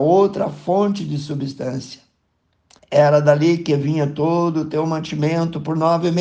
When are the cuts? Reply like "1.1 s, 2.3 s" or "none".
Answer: 2.8 s